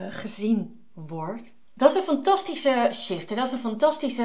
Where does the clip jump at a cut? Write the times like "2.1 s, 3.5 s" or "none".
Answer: none